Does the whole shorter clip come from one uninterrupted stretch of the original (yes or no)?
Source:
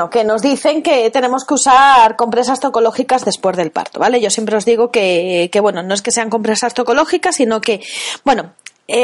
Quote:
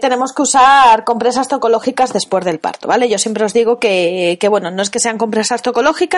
yes